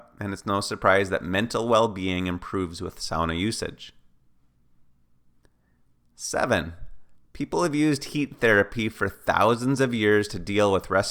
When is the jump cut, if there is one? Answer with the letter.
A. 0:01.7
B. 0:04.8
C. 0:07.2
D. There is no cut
C